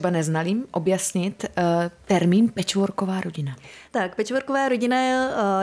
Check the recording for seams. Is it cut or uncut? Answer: uncut